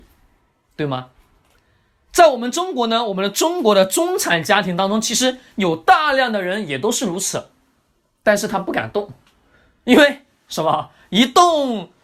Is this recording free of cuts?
yes; 0 cuts

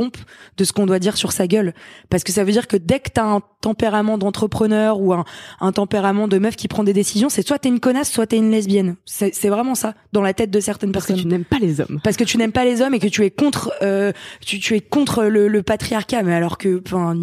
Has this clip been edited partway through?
no; 0 cuts

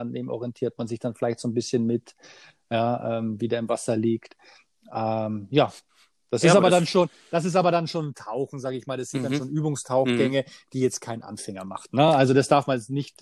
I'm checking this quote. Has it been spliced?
no; 0 cuts

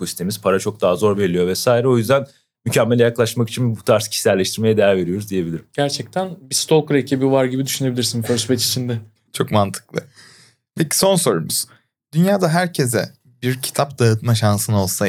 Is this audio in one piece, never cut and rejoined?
yes; 0 cuts

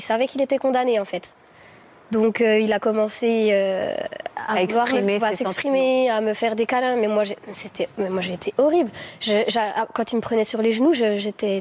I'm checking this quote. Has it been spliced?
no; 0 cuts

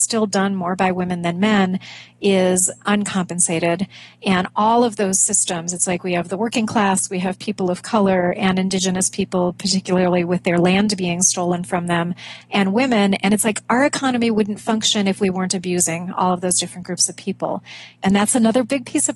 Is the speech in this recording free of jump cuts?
yes; 0 cuts

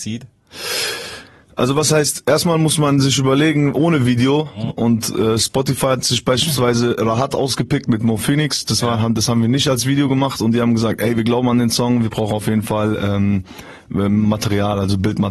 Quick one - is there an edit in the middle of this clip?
yes; 1 cut; at 4.7 s

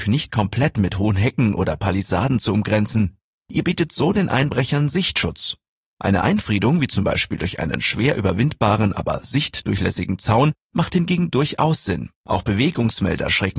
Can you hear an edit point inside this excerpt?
yes; 1 cut; at 12.2 s

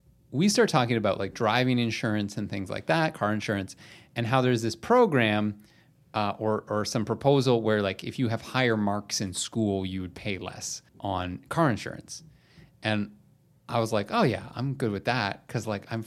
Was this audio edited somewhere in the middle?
yes; 1 cut; at 10.9 s

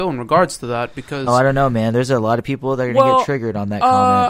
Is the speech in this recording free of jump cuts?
yes; 0 cuts

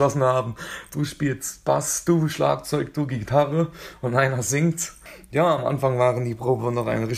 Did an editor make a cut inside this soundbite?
no; 0 cuts

